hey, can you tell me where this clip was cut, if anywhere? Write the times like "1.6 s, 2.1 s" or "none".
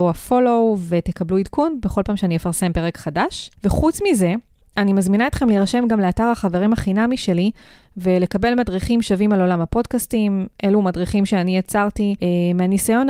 none